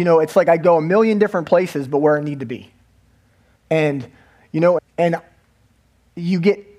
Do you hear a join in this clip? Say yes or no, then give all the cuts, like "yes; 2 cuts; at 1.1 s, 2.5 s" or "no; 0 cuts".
yes; 2 cuts; at 3.6 s, 4.8 s